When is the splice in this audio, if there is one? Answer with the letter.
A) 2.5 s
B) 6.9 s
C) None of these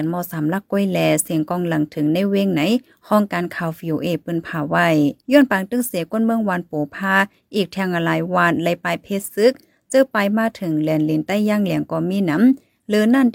C